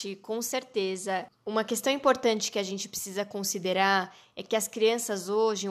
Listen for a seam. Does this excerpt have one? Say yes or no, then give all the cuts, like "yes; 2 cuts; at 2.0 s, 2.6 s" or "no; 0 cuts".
no; 0 cuts